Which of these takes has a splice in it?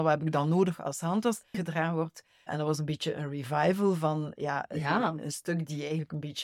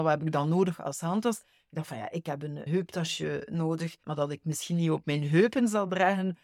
first; 1 cut; at 1.5 s

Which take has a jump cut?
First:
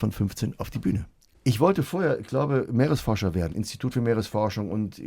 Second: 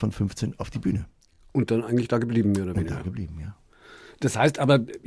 first; 2 cuts; at 1.3 s, 3.5 s

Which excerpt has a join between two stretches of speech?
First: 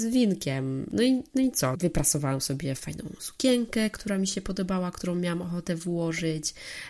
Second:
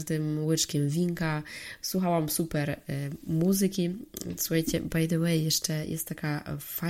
first; 1 cut; at 1.7 s

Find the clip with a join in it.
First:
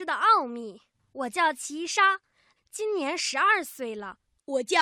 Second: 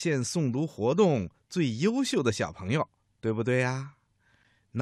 first; 2 cuts; at 0.9 s, 2.6 s

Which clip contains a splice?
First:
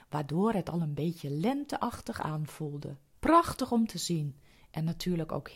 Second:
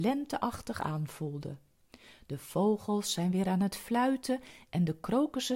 first; 1 cut; at 3.1 s

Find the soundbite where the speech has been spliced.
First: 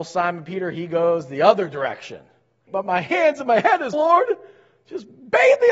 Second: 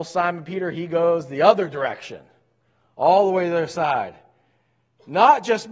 first; 2 cuts; at 2.7 s, 3.9 s

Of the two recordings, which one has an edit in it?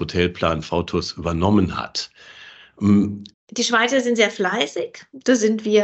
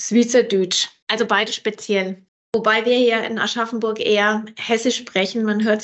first; 1 cut; at 3.3 s

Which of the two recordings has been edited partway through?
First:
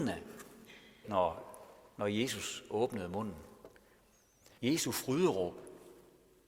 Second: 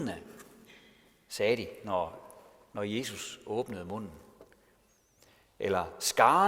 first; 2 cuts; at 1.0 s, 4.6 s

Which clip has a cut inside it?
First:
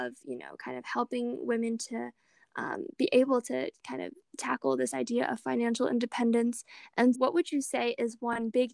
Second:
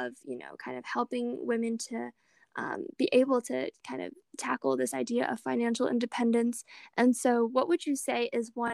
first; 1 cut; at 7.1 s

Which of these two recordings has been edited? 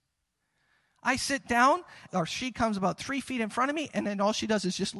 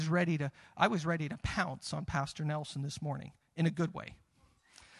first; 1 cut; at 2.1 s

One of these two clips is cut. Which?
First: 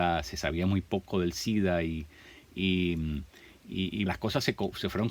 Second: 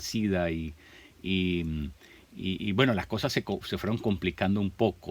first; 1 cut; at 4.1 s

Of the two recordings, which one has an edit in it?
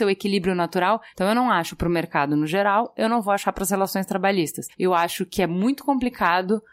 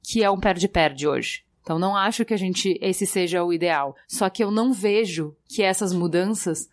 first; 1 cut; at 1.1 s

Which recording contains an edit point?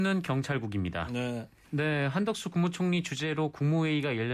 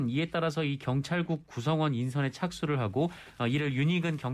first; 1 cut; at 1.6 s

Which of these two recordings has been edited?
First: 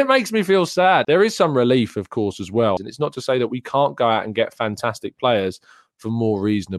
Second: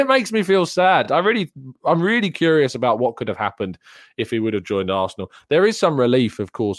first; 2 cuts; at 1.0 s, 2.8 s

